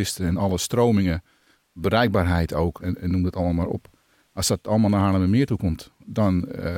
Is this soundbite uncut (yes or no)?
no